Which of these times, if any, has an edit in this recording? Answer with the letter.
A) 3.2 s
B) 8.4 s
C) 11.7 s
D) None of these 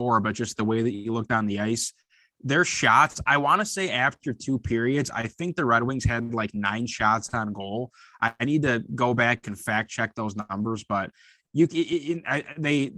D